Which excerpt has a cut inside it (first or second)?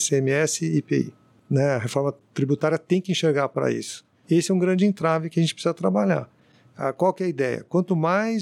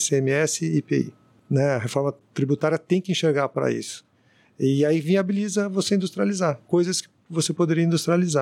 first